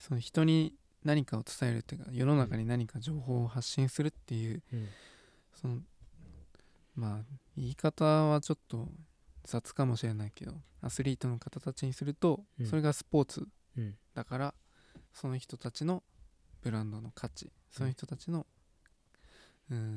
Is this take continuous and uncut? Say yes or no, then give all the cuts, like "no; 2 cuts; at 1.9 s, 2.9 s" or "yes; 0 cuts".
no; 2 cuts; at 10.6 s, 15.1 s